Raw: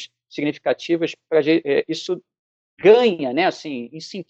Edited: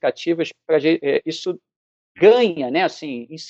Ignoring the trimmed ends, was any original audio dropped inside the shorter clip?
no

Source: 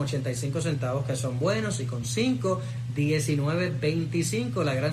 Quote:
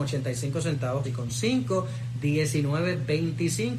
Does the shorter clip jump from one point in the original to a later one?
yes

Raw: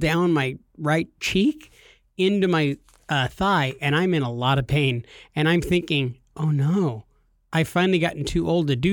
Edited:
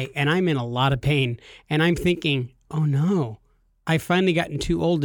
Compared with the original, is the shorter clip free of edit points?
yes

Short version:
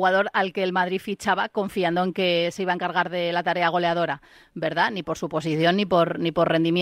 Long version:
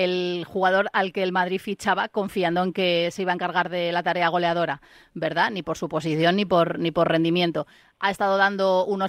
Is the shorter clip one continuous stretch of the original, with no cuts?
yes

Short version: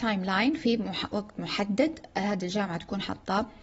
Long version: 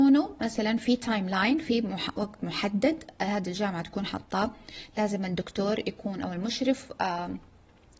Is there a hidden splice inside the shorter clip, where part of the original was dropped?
no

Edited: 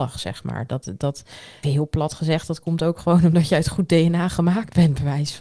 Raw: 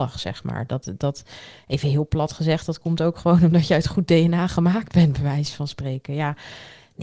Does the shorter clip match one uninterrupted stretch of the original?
no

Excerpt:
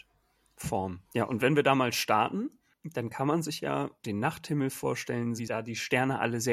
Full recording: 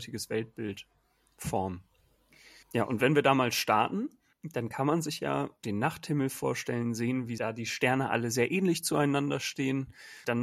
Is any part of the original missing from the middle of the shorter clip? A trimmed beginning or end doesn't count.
yes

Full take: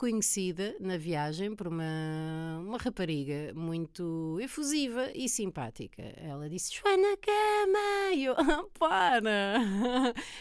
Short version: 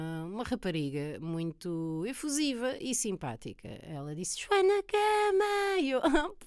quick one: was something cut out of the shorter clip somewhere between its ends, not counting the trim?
no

